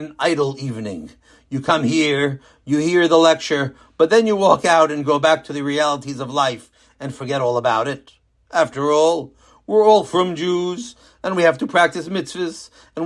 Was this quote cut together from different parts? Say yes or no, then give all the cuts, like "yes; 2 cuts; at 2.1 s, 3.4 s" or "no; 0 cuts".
no; 0 cuts